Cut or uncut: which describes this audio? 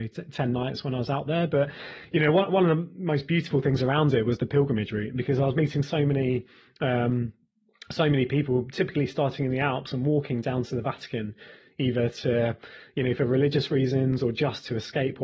uncut